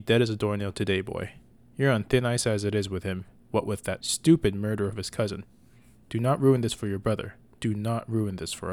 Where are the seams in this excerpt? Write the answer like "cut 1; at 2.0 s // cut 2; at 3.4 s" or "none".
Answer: cut 1; at 4.0 s